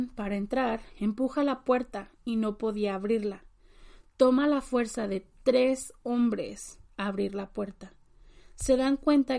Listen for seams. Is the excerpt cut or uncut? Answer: uncut